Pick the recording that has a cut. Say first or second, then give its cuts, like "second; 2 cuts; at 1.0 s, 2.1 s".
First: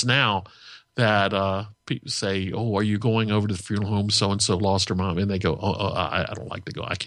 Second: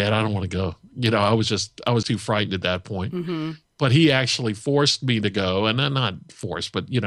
second; 1 cut; at 2.0 s